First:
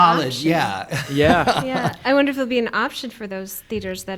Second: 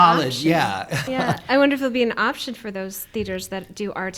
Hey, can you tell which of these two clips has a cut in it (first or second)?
second